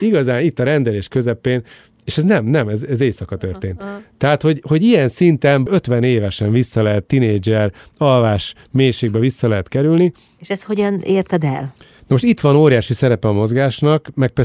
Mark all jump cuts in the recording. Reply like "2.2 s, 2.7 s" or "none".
none